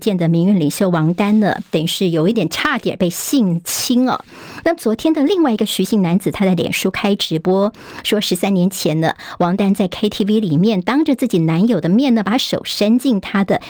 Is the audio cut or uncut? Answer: cut